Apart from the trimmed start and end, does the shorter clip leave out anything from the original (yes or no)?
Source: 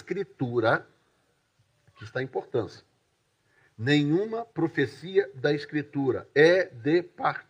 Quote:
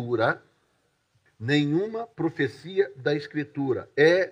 yes